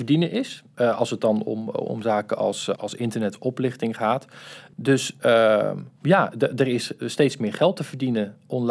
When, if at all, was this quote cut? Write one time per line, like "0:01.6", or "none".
0:02.8